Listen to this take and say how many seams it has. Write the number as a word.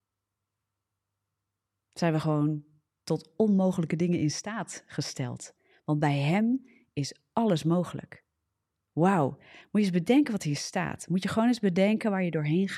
zero